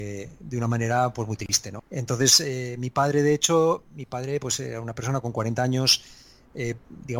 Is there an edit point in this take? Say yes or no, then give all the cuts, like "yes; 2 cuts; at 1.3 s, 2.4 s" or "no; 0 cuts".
yes; 1 cut; at 1.8 s